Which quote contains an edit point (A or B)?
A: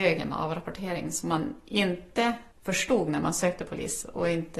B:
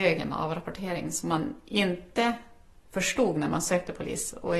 A